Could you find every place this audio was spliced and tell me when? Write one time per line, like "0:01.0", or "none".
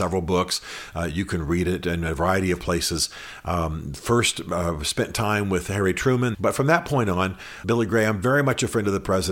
0:06.3
0:07.6